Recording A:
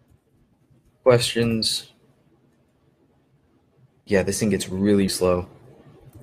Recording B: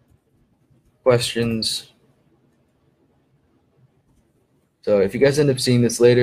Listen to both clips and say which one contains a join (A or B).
A